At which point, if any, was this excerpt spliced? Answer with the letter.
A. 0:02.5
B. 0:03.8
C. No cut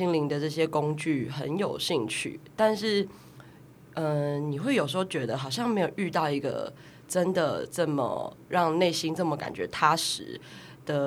C